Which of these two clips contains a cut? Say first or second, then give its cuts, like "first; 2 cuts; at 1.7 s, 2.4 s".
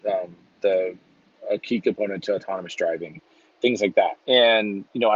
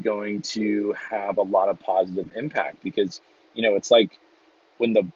first; 1 cut; at 4.2 s